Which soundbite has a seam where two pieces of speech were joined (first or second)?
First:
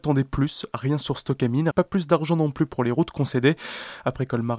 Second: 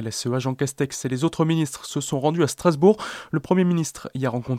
first